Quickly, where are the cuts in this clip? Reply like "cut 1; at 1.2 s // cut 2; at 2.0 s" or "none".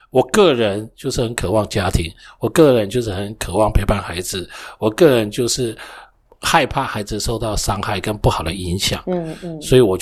none

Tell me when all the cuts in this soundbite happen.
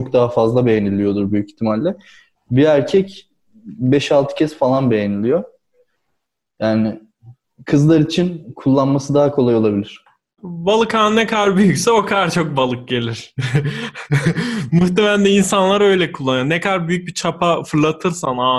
cut 1; at 10.4 s

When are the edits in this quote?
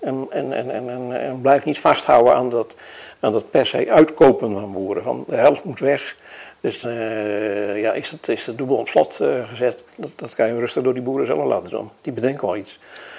cut 1; at 6.8 s // cut 2; at 9.9 s

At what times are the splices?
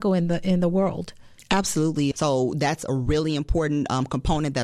cut 1; at 2.1 s

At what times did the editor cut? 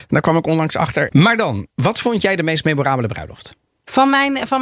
cut 1; at 1.1 s

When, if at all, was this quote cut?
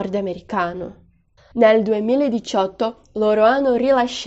cut 1; at 1.5 s

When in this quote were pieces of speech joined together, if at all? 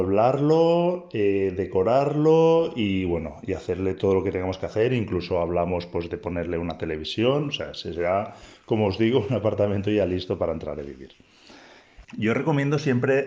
cut 1; at 12.0 s

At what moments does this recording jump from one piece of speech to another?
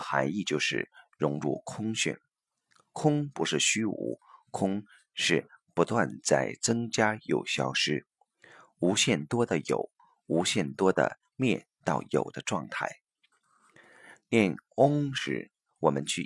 none

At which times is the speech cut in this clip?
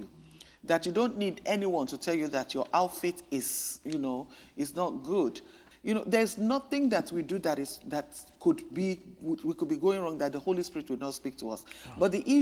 cut 1; at 5.7 s

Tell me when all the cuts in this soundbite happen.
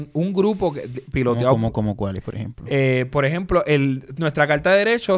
none

